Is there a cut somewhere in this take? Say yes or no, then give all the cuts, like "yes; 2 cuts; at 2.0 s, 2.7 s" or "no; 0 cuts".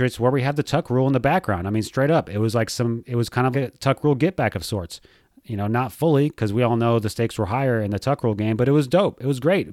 yes; 1 cut; at 3.5 s